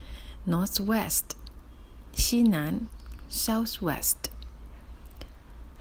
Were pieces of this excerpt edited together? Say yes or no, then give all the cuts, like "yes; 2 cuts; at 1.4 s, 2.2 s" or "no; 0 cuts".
no; 0 cuts